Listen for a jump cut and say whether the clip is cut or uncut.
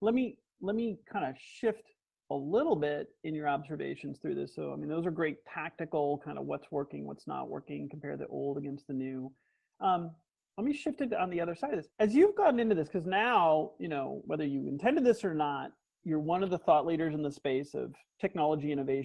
cut